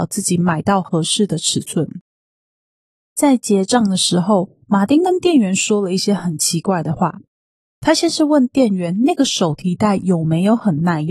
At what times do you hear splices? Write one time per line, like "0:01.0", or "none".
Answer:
none